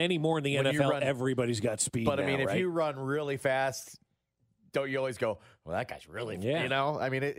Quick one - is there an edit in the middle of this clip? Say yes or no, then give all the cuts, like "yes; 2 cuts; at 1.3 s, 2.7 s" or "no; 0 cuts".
no; 0 cuts